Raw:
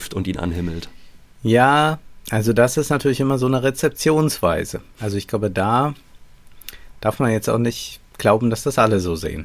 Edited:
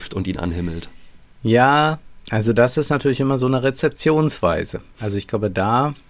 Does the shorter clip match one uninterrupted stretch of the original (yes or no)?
yes